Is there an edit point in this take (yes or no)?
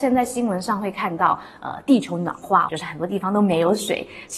yes